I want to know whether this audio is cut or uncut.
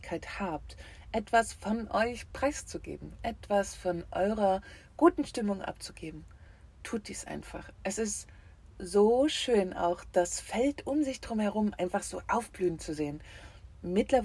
uncut